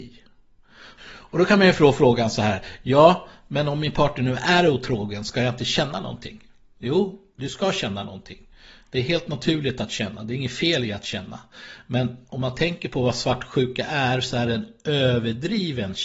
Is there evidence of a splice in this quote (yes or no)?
yes